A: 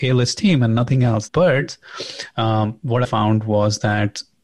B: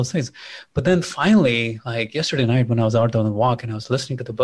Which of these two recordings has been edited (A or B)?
A